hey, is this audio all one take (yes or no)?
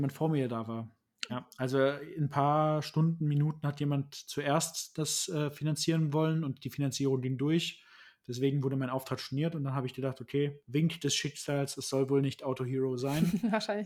no